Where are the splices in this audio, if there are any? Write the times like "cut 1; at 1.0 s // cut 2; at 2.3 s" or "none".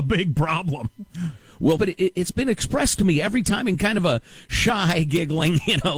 cut 1; at 1.8 s